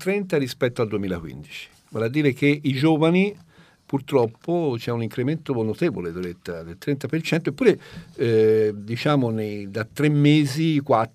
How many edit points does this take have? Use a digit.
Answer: 0